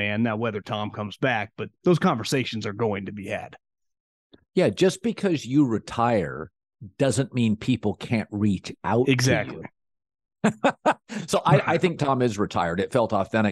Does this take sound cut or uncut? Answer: uncut